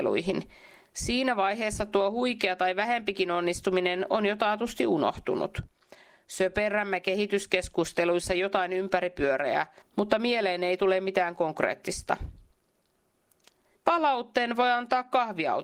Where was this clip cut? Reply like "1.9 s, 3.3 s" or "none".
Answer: 9.8 s, 13.8 s